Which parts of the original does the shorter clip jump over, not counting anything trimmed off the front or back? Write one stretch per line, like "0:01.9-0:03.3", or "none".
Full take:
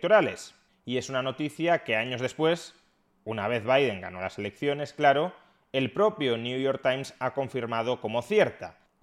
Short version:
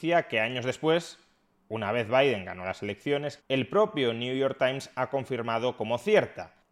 0:04.9-0:05.6

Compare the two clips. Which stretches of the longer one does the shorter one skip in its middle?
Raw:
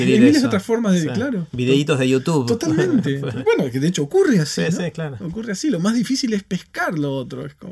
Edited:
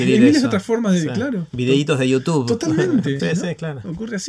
0:03.2-0:04.6

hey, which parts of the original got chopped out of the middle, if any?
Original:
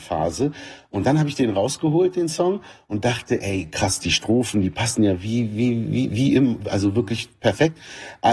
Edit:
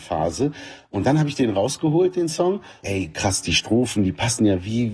0:02.8-0:03.4

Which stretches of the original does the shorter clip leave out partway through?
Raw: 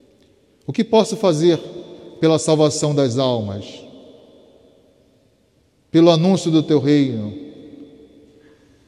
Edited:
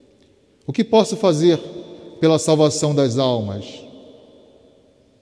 none

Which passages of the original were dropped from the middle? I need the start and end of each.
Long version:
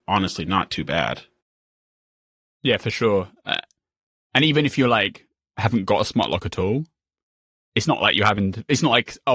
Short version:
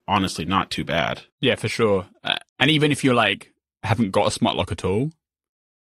0:01.3-0:02.5
0:03.7-0:04.2

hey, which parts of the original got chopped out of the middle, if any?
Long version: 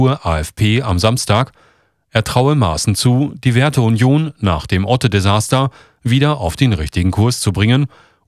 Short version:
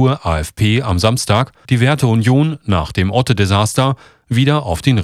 0:01.6-0:03.4

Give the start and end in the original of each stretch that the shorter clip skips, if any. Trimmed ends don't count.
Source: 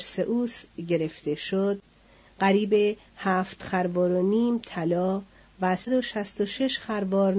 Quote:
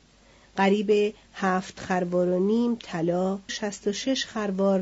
0:05.3-0:06.0

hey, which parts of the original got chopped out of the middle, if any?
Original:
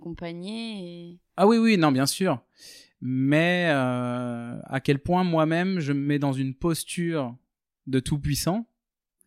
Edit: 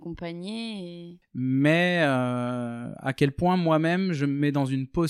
0:01.2-0:02.9

